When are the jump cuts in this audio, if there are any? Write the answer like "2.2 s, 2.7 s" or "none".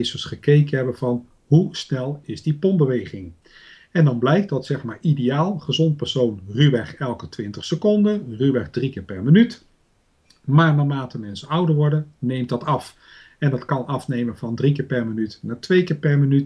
none